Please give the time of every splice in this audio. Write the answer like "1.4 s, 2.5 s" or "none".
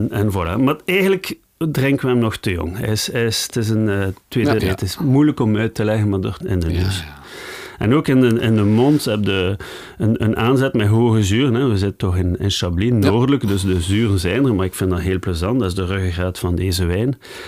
4.6 s, 6.4 s